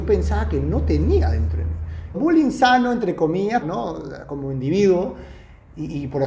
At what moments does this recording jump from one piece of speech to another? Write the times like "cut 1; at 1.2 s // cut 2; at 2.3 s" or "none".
cut 1; at 2.1 s // cut 2; at 3.6 s